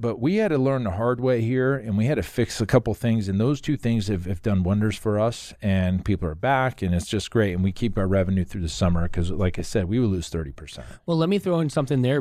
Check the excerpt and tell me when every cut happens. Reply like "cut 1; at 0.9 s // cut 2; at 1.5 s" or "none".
none